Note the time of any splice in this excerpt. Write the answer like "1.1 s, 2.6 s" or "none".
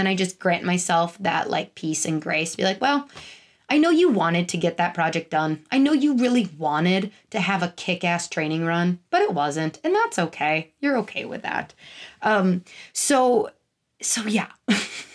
none